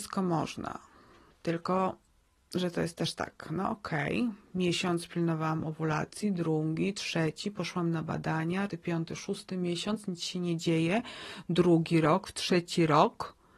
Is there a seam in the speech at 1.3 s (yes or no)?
yes